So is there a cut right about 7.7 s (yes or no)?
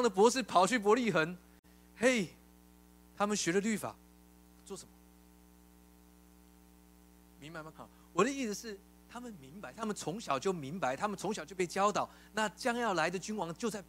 yes